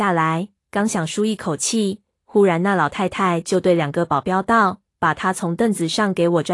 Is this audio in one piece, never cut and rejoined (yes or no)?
yes